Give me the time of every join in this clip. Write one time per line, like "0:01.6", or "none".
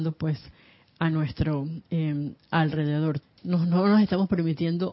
0:03.2